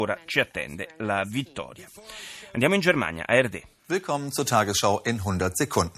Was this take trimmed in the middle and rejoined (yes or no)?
no